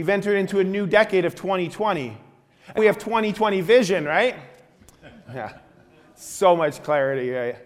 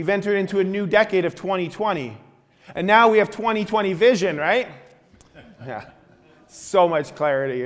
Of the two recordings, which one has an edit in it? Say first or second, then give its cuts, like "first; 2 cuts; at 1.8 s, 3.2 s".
first; 1 cut; at 2.8 s